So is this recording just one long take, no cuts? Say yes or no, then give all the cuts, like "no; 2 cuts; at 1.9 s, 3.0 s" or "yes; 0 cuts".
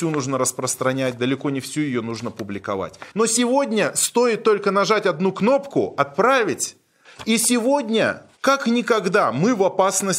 no; 3 cuts; at 3.1 s, 7.0 s, 8.4 s